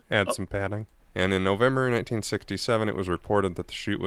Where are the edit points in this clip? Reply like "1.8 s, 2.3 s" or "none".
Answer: 1.0 s